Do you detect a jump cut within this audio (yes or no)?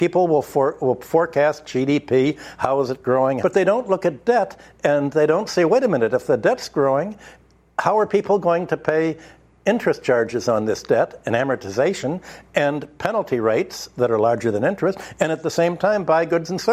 yes